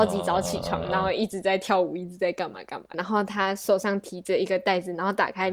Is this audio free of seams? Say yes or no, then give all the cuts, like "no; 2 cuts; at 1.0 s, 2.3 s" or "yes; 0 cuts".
no; 1 cut; at 2.9 s